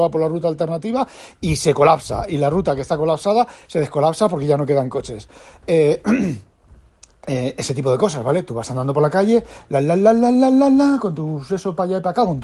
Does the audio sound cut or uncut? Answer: cut